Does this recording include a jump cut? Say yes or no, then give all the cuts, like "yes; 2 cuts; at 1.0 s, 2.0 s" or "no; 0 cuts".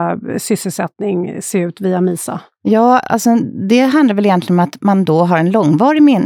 no; 0 cuts